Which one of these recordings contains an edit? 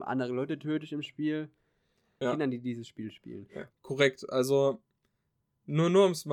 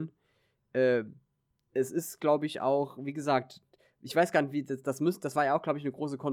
first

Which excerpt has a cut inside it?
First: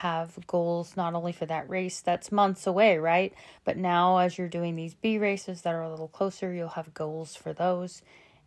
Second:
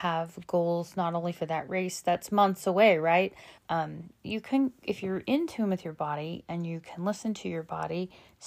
second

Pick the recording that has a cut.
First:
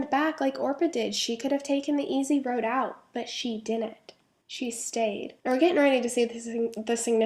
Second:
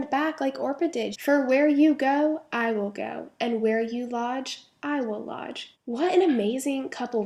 second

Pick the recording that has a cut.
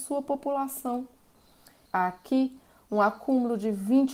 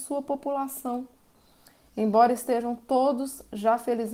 first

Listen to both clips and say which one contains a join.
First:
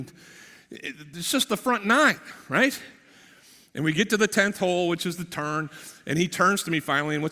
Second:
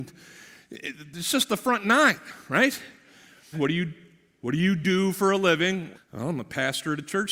second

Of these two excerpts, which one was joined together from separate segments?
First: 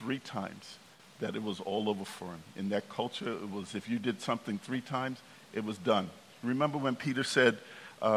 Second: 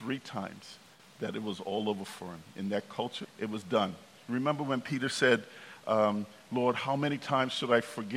second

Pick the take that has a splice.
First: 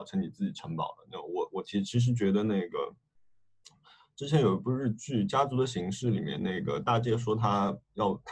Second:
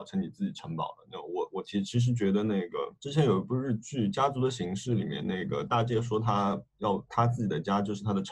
second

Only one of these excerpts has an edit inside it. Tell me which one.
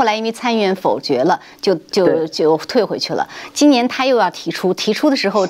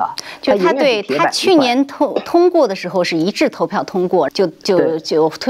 second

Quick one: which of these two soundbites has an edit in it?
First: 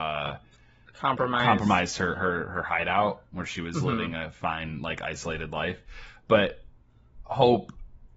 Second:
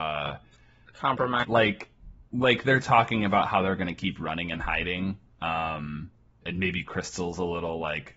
second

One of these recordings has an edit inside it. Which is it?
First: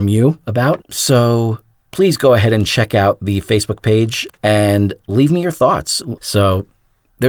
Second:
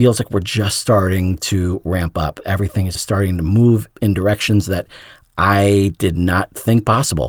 first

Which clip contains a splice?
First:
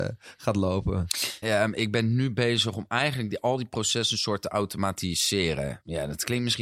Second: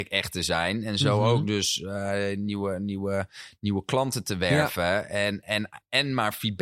first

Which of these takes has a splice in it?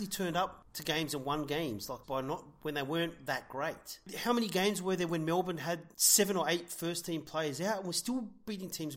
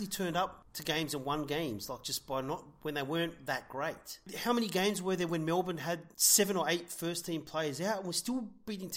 first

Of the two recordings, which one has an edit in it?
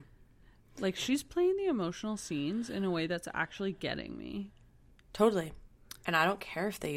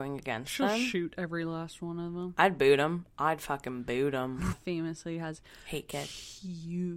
second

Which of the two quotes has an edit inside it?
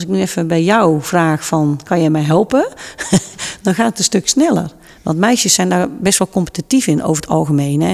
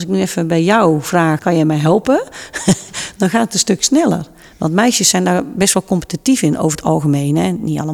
second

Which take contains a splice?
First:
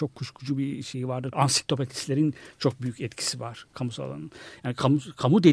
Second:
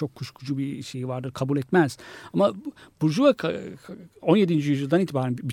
first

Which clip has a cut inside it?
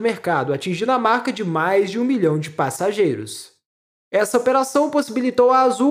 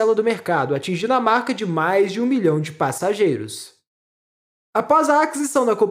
first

